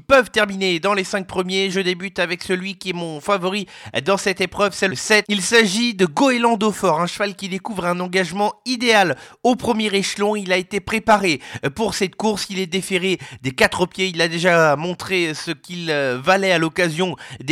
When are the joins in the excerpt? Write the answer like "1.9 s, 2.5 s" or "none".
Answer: none